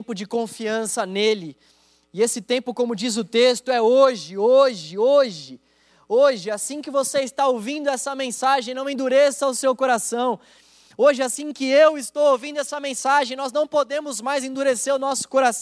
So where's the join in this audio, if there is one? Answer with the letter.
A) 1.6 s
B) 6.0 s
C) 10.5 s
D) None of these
D